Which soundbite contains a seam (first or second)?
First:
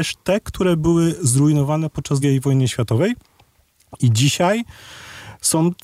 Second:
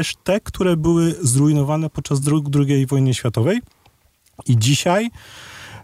first